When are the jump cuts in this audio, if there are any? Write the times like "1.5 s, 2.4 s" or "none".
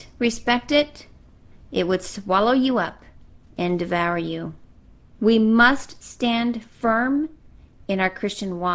5.1 s